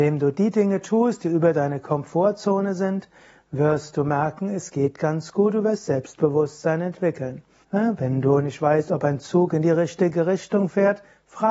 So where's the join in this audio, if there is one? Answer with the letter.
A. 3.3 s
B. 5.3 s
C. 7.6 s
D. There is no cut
C